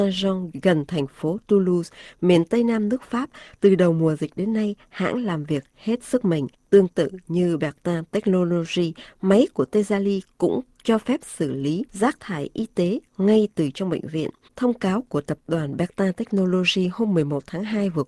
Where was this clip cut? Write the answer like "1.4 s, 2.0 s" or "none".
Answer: 14.5 s